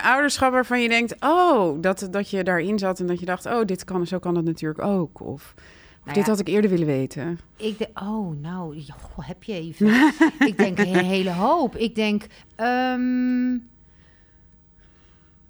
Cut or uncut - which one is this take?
cut